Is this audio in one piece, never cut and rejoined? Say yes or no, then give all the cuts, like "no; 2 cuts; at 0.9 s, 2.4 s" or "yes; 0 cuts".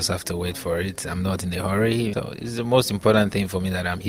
no; 1 cut; at 2.1 s